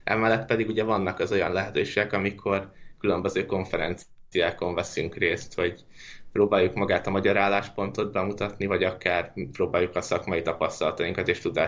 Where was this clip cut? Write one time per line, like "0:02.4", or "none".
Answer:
none